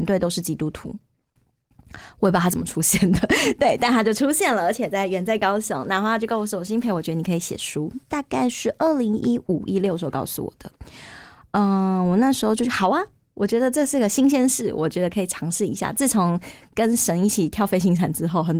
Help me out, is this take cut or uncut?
uncut